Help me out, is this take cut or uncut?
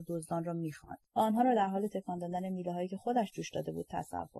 cut